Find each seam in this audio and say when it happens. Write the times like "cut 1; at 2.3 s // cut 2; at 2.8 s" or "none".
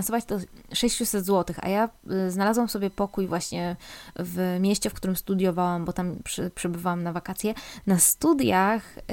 cut 1; at 7.8 s